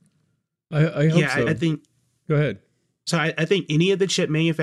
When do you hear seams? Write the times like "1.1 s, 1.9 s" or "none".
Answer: none